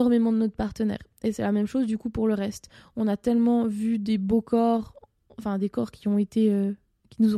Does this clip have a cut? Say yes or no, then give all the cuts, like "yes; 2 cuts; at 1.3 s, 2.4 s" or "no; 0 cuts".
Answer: no; 0 cuts